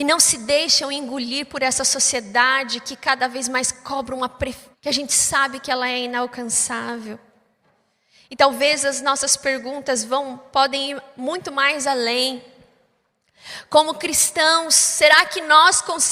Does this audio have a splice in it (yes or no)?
yes